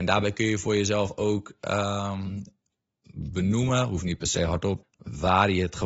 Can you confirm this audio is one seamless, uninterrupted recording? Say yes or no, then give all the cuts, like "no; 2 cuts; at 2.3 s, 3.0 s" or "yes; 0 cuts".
no; 1 cut; at 4.8 s